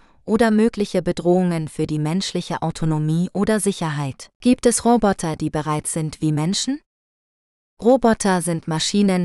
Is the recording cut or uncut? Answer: cut